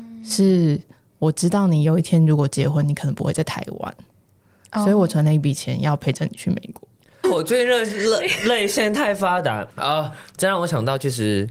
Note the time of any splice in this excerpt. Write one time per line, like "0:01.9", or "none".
0:07.2
0:09.7